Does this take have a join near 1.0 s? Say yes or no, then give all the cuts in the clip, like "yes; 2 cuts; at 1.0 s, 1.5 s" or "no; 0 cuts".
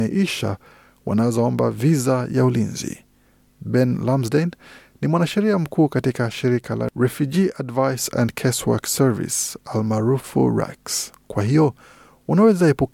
no; 1 cut; at 11.1 s